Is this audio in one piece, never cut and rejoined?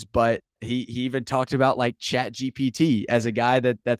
yes; 0 cuts

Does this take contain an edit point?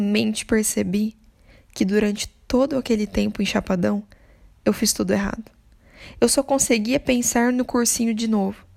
no; 0 cuts

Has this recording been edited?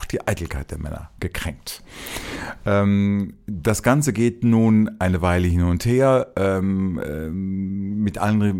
no; 0 cuts

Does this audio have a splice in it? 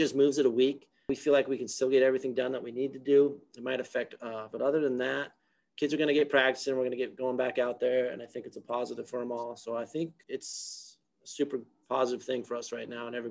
yes; 1 cut; at 4.5 s

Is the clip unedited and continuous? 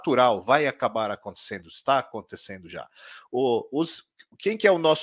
yes; 0 cuts

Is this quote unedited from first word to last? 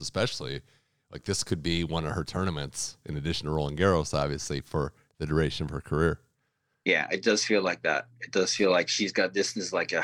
yes; 0 cuts

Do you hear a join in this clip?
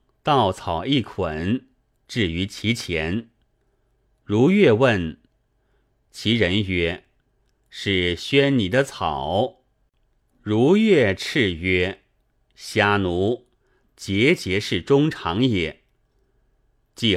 yes; 2 cuts; at 6.1 s, 13.8 s

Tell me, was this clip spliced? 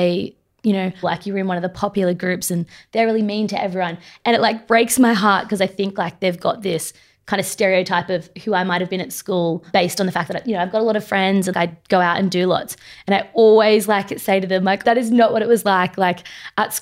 yes; 3 cuts; at 1.0 s, 11.5 s, 14.8 s

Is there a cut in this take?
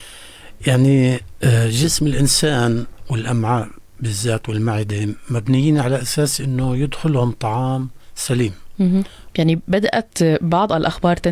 yes; 1 cut; at 9.3 s

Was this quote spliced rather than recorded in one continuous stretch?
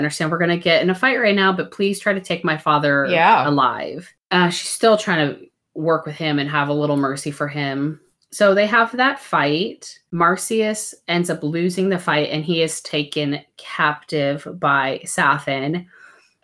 no; 0 cuts

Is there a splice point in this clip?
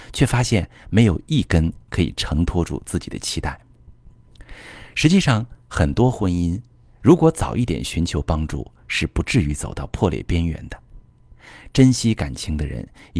no; 0 cuts

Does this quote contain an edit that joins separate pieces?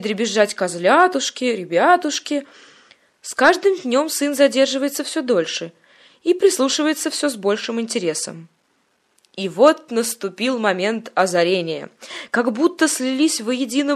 no; 0 cuts

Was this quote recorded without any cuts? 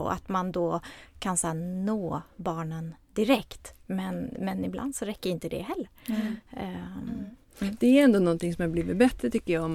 yes; 0 cuts

